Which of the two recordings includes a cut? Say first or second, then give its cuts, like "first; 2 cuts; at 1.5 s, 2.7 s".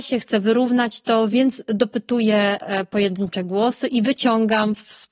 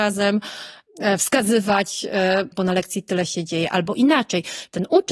second; 1 cut; at 2.5 s